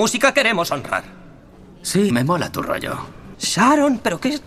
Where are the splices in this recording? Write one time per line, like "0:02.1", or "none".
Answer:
0:02.1
0:03.3